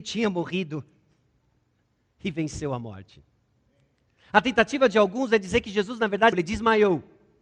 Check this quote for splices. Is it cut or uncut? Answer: cut